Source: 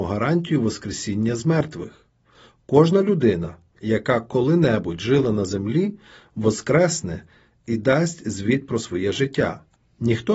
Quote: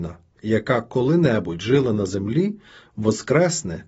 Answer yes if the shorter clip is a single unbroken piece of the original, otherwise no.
yes